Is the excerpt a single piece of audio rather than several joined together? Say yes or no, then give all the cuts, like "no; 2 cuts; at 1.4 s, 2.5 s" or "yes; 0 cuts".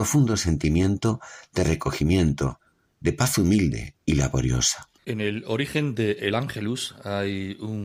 yes; 0 cuts